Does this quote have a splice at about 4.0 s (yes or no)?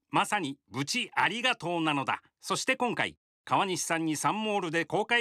no